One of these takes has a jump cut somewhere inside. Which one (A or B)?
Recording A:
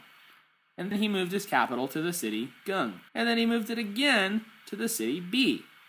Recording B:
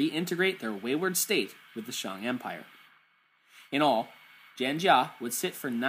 A